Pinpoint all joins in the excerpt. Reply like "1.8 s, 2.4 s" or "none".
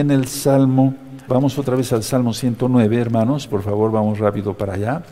1.3 s